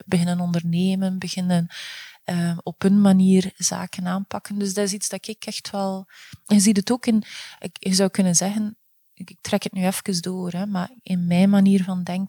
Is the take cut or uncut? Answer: uncut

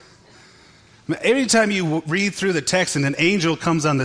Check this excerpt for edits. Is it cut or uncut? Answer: uncut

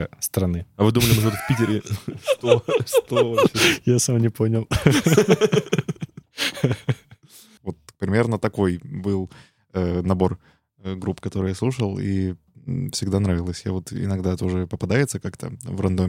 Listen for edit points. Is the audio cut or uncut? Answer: cut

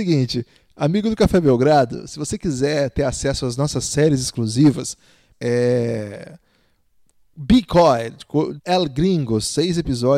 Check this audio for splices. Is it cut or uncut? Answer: cut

